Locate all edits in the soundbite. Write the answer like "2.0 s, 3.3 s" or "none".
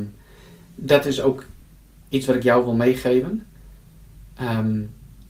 none